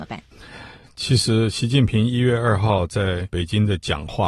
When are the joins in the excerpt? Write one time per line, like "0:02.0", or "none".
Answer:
none